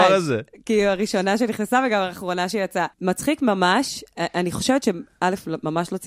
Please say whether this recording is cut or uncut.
cut